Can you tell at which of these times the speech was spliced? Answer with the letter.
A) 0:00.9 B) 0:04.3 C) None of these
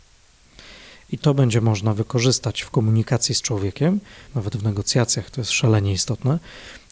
B